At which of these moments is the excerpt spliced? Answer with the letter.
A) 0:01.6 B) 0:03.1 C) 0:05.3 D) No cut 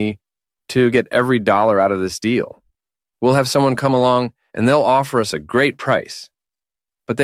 B